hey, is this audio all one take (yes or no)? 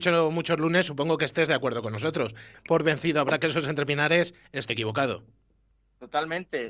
no